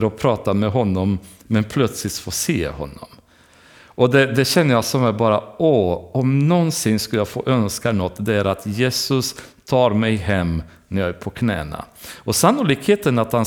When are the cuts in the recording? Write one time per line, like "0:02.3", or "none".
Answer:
none